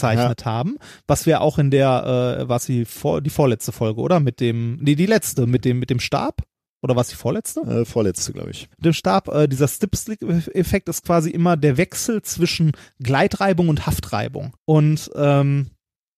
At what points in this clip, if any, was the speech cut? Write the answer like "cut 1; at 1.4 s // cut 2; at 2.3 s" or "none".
cut 1; at 8.7 s // cut 2; at 11.6 s // cut 3; at 14.6 s